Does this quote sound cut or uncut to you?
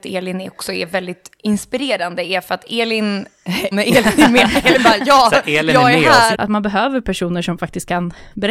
cut